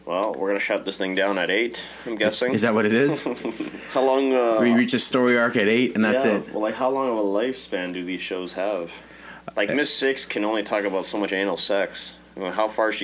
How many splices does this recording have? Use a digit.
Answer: 0